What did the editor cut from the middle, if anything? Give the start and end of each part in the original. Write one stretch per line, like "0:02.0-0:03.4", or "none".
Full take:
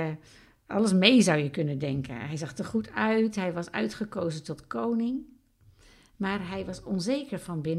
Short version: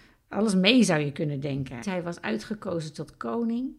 0:02.2-0:03.3